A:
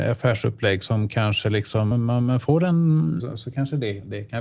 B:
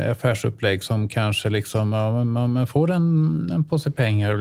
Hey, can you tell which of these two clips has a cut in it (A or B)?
A